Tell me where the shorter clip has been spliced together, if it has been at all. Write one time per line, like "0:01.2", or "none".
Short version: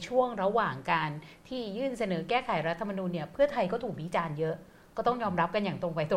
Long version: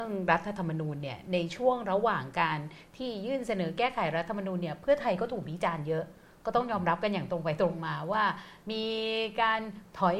none